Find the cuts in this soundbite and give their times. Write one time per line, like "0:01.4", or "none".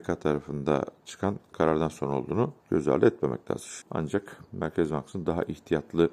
0:02.6
0:03.8